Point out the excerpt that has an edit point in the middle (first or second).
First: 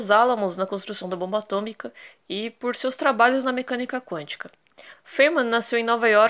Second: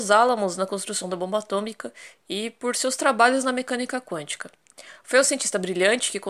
first